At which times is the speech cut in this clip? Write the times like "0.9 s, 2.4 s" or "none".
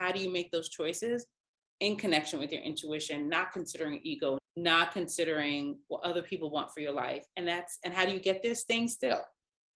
4.4 s